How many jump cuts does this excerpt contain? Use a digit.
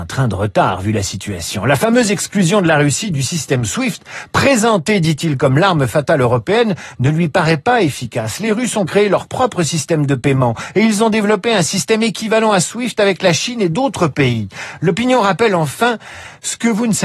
0